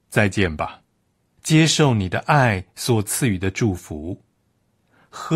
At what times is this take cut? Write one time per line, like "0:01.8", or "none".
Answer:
0:01.4